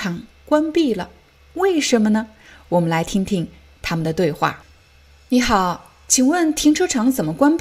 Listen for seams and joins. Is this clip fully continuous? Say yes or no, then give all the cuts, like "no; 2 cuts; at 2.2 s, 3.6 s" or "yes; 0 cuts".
yes; 0 cuts